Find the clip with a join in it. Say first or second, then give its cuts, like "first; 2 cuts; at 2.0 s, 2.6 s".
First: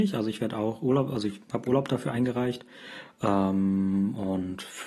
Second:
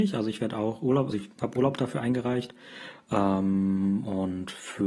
second; 1 cut; at 1.1 s